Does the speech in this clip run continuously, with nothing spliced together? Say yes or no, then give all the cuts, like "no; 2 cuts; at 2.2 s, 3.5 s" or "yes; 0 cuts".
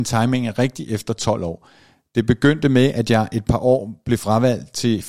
yes; 0 cuts